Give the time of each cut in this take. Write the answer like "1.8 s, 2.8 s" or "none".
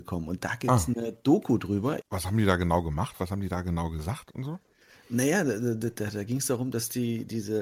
2.0 s

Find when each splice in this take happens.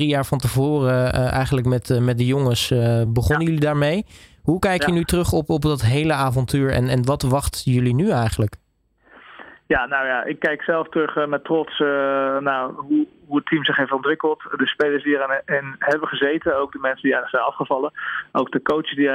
none

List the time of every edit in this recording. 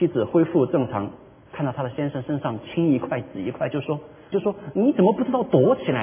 4.3 s

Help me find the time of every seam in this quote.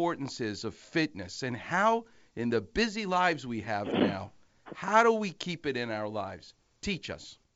none

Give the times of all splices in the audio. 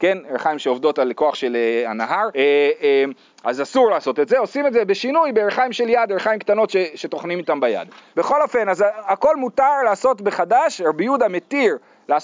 2.3 s, 8.1 s

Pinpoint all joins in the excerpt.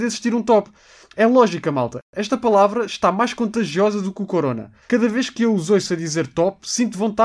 4.8 s

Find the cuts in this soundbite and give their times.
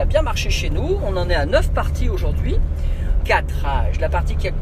3.2 s

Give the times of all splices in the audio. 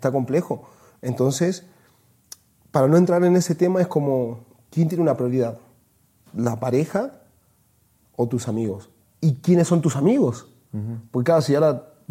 9.0 s

